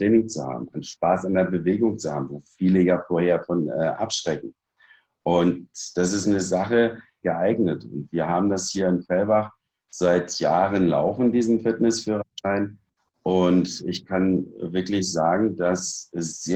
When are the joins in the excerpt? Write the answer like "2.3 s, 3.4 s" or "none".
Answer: 7.2 s